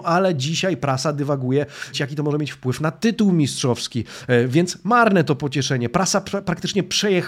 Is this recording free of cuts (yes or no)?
no